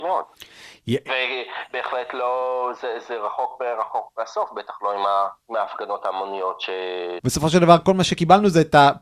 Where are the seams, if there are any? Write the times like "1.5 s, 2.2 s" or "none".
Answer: 5.4 s, 7.2 s

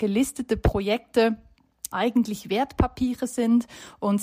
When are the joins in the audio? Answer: 1.9 s

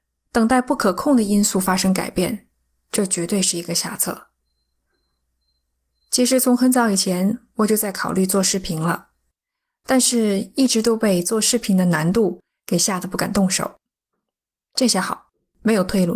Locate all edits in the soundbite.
none

